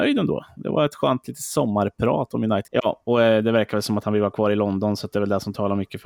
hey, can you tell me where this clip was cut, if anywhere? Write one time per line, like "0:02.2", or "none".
0:02.7